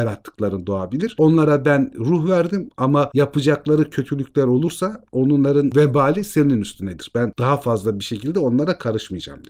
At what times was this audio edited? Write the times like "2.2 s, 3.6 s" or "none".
none